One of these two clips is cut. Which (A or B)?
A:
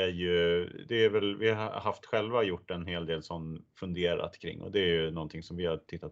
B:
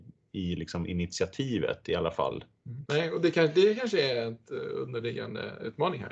B